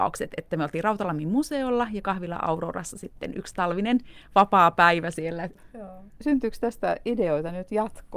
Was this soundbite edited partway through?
no; 0 cuts

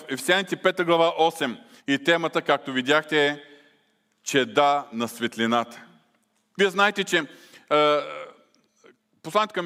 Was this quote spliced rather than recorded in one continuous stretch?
yes; 2 cuts; at 1.8 s, 6.5 s

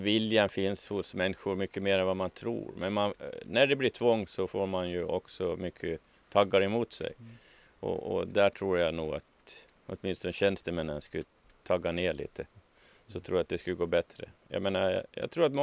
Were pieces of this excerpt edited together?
no; 0 cuts

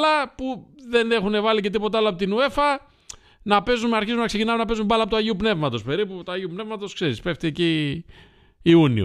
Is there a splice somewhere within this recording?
no; 0 cuts

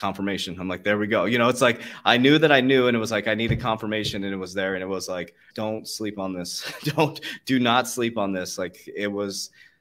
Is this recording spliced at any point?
yes; 1 cut; at 5.5 s

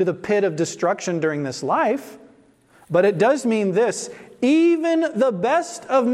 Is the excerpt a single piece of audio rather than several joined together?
yes; 0 cuts

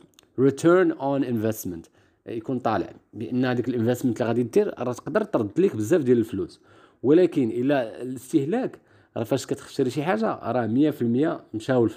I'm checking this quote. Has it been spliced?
no; 0 cuts

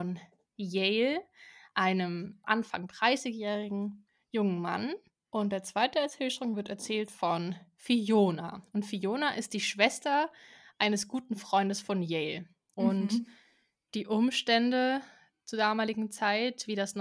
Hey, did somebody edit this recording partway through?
yes; 2 cuts; at 2.4 s, 12.7 s

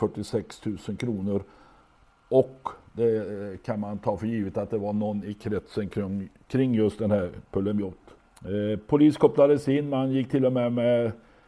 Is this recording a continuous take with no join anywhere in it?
yes; 0 cuts

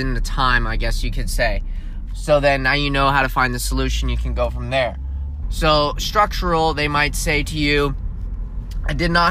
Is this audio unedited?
no; 2 cuts; at 2.1 s, 5.4 s

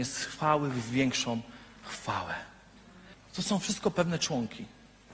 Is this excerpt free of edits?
no; 1 cut; at 3.1 s

